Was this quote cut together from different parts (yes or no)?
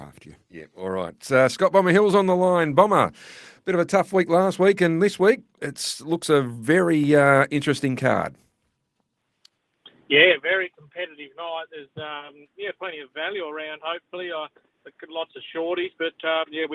no